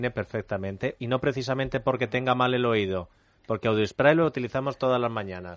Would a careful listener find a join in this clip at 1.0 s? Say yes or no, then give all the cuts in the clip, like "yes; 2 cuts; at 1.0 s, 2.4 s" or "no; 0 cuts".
yes; 1 cut; at 1.0 s